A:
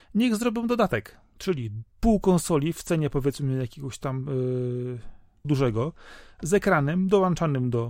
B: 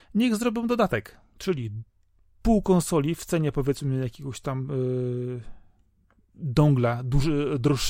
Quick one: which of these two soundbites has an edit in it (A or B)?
A